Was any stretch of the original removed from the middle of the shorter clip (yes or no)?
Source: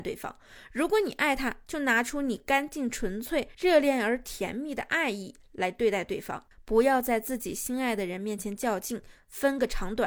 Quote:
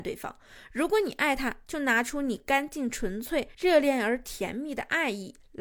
no